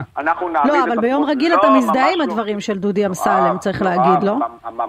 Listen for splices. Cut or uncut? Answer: uncut